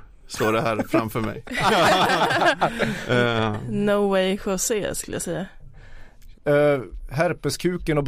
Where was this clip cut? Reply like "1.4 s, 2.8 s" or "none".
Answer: 6.3 s